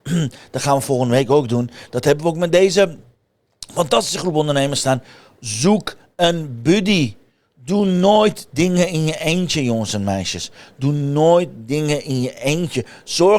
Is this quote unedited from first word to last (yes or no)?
yes